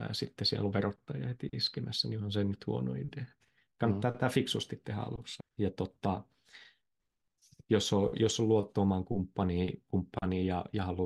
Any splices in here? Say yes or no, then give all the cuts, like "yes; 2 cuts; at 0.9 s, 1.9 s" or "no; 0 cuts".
yes; 1 cut; at 5.4 s